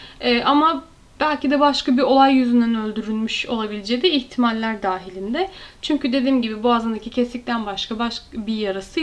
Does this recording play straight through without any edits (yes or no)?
yes